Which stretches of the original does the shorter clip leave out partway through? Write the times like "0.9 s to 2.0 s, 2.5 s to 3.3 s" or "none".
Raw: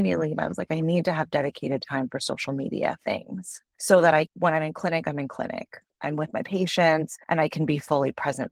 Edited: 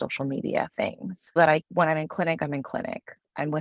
3.6 s to 4.0 s